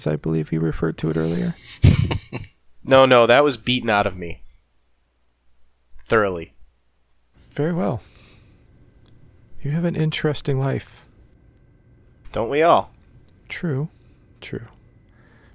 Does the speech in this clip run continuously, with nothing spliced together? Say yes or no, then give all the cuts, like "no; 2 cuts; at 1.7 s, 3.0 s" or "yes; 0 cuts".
yes; 0 cuts